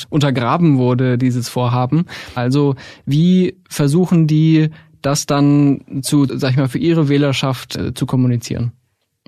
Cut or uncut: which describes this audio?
cut